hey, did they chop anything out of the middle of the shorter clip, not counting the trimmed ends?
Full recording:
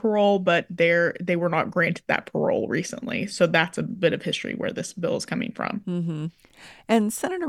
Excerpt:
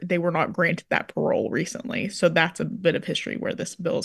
no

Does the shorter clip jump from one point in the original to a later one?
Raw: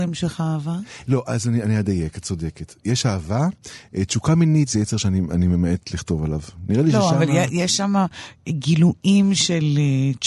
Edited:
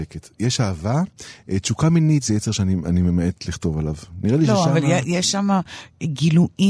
no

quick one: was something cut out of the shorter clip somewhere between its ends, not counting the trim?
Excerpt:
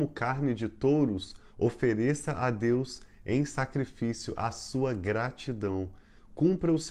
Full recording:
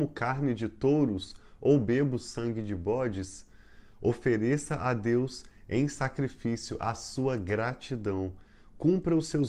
yes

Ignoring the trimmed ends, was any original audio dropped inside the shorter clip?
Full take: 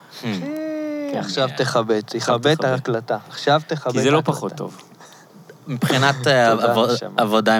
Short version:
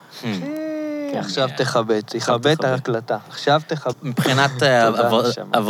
yes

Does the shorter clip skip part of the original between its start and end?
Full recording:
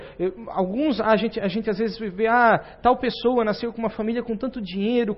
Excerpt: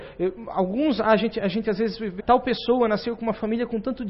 yes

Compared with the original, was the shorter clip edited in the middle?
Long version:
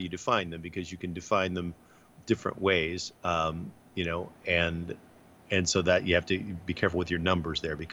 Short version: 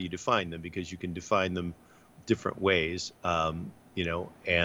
no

